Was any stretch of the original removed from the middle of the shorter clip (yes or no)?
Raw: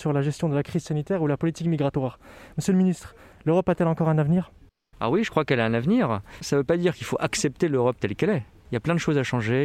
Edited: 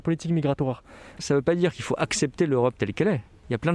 yes